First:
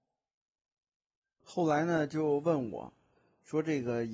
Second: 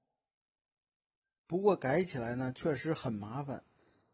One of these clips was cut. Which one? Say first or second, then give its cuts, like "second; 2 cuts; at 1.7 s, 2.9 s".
first; 1 cut; at 1.4 s